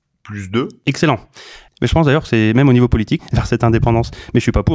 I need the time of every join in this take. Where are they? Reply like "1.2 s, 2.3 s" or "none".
1.7 s, 3.2 s